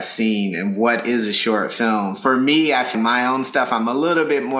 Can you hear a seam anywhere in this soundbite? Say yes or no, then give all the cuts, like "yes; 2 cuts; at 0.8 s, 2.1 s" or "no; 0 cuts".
yes; 1 cut; at 2.9 s